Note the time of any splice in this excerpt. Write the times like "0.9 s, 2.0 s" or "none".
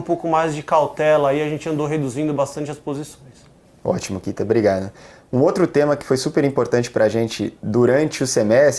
none